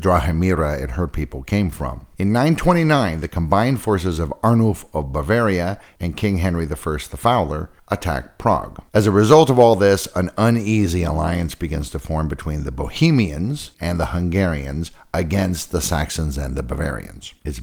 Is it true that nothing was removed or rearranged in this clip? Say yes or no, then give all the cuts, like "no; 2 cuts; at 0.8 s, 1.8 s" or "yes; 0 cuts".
no; 2 cuts; at 8.9 s, 13.7 s